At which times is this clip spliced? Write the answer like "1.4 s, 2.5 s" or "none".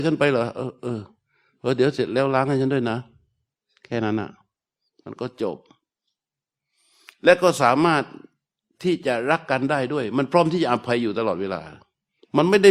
none